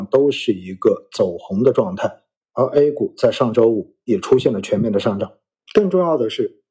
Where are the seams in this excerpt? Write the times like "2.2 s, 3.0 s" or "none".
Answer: none